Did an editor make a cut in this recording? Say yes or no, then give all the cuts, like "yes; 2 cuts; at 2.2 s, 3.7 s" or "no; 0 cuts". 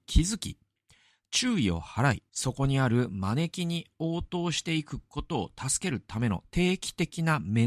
yes; 1 cut; at 2.3 s